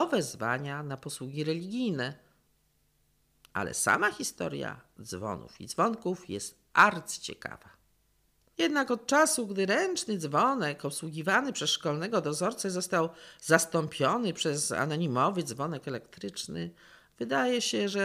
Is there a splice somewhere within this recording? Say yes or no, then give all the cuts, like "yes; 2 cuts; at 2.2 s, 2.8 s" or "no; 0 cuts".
yes; 1 cut; at 8.5 s